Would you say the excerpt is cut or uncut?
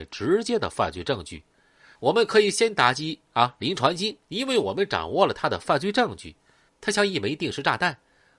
cut